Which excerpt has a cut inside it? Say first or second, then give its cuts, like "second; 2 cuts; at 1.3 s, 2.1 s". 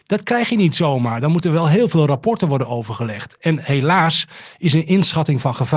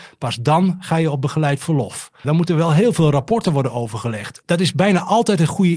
second; 2 cuts; at 2.2 s, 4.4 s